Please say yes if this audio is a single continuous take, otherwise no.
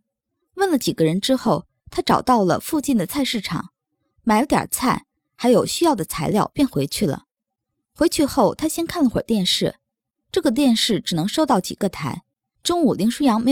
no